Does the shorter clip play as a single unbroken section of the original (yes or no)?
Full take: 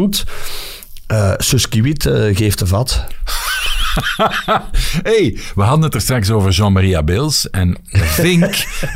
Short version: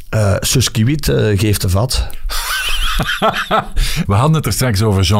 no